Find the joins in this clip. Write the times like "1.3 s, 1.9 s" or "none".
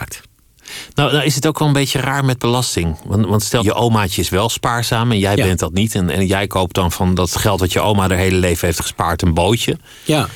3.6 s